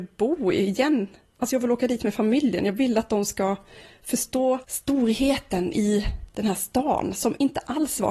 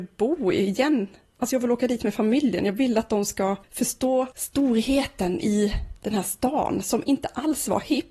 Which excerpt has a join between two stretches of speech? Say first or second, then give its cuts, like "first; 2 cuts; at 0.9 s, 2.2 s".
second; 1 cut; at 3.6 s